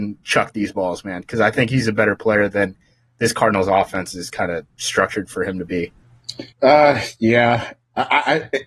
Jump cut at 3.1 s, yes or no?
no